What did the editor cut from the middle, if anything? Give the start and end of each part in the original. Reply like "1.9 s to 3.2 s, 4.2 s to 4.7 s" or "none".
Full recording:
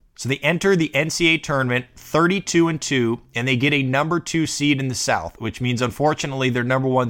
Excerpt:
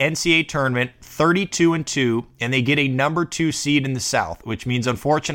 none